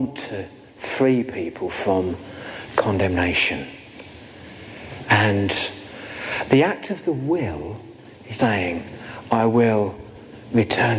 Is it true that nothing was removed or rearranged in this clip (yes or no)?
no